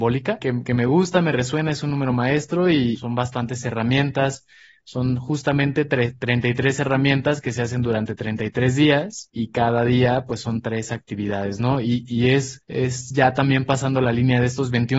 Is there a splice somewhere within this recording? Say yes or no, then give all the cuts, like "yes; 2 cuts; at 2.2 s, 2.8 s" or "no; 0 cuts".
no; 0 cuts